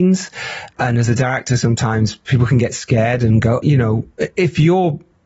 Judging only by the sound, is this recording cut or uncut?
cut